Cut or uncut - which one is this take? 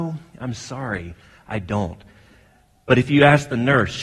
uncut